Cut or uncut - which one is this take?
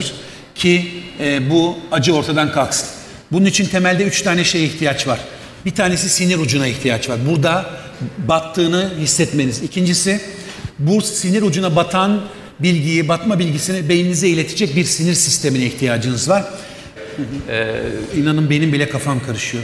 cut